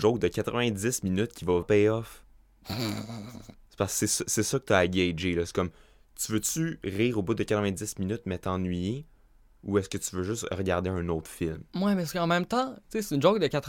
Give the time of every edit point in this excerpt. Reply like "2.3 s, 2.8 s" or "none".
1.6 s